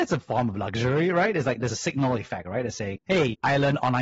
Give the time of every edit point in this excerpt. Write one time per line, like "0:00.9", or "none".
0:03.0